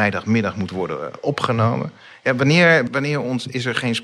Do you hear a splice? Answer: yes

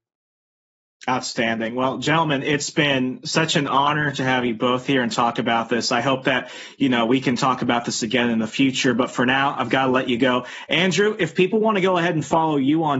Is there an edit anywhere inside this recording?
no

